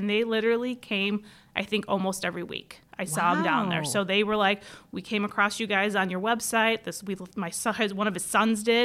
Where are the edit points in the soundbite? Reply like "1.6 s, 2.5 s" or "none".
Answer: none

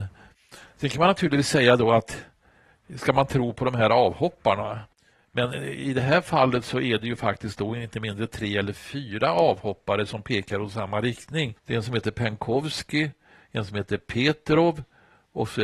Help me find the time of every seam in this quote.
none

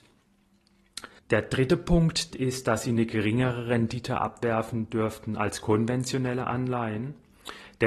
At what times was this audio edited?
1.2 s, 2.3 s

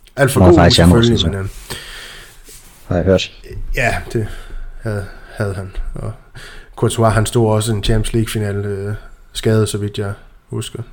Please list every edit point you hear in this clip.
none

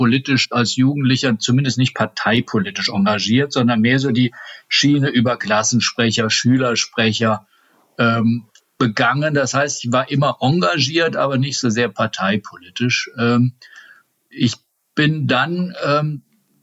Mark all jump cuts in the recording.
none

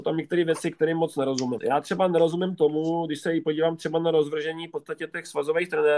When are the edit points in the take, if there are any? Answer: 1.6 s

